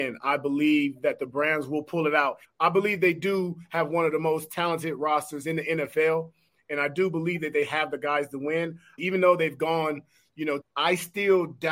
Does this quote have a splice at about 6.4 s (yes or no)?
no